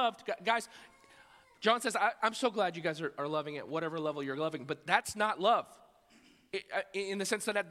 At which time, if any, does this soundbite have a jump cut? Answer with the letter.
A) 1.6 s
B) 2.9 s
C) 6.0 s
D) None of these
D